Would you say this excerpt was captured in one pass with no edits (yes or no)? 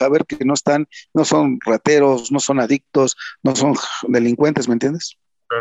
yes